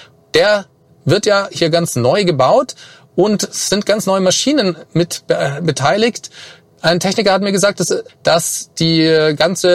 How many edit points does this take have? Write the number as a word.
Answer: one